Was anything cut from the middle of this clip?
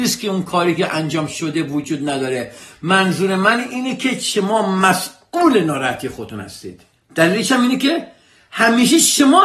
no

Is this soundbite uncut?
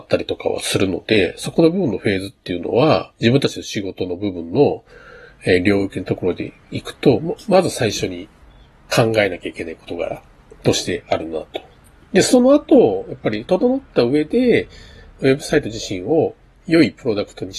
yes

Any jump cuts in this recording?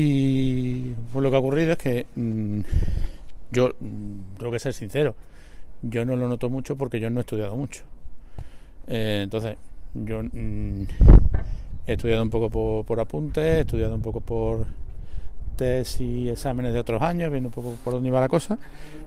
no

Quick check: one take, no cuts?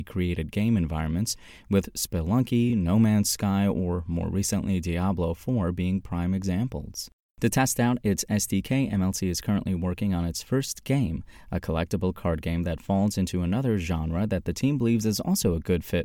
yes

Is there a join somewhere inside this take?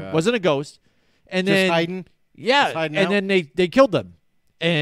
no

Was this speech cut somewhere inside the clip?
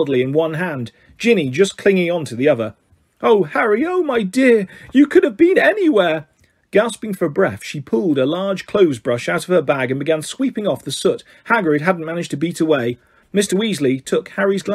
no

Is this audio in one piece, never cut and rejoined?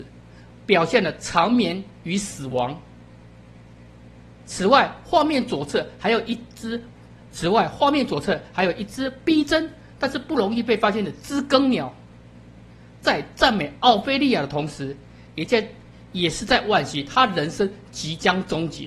yes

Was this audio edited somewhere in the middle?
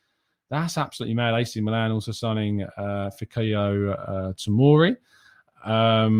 no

